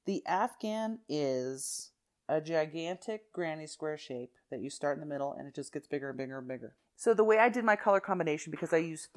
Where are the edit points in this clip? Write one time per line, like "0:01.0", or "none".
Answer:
0:06.9